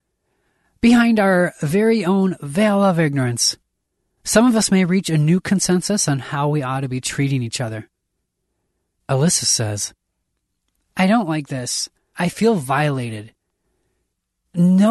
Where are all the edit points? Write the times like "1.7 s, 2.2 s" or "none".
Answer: 12.1 s